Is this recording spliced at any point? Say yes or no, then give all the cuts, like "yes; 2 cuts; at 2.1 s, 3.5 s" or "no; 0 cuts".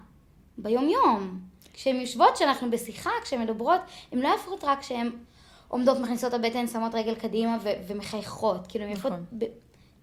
no; 0 cuts